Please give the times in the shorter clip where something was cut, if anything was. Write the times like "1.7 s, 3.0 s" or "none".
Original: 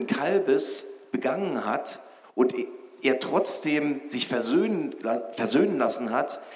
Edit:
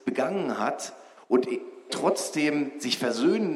1.9 s